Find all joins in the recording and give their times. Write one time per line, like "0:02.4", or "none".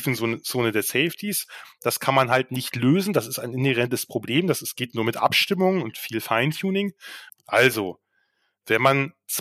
0:07.3